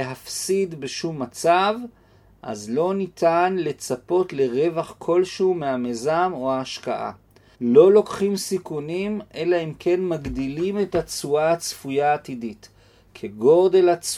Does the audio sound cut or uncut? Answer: cut